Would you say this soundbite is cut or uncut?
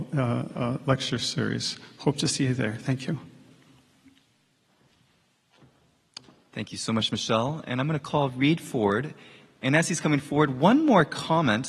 uncut